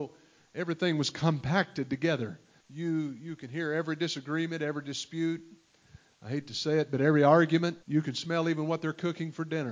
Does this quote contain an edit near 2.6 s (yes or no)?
yes